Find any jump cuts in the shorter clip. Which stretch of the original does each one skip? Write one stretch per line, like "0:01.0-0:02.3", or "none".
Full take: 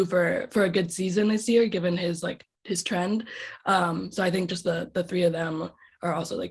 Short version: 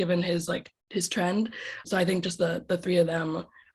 0:03.6-0:04.1